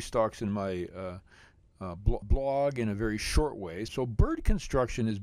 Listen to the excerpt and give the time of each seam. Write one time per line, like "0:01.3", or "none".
0:02.2
0:03.9